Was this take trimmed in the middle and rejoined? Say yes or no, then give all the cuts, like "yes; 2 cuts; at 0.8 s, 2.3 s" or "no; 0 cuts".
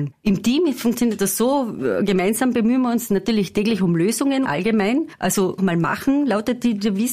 yes; 2 cuts; at 4.4 s, 5.6 s